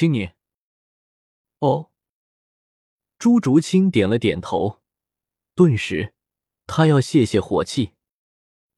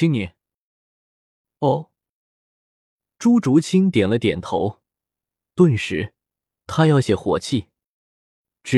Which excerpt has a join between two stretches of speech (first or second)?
second